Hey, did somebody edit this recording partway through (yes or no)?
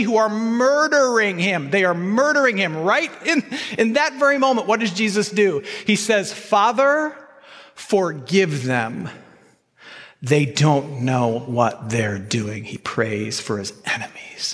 no